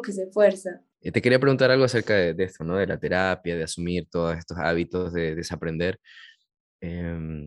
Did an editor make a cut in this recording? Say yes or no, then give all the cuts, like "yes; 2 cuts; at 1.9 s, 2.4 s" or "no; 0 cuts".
yes; 1 cut; at 0.9 s